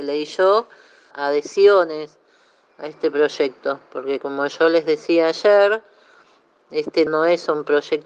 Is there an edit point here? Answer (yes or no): yes